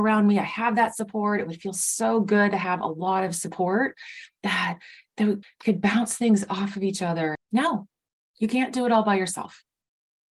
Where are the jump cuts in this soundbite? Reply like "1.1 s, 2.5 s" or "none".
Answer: 5.4 s, 7.4 s